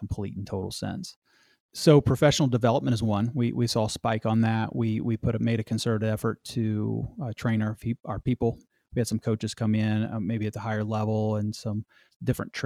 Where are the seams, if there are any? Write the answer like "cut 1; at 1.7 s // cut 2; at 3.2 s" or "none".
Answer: cut 1; at 1.6 s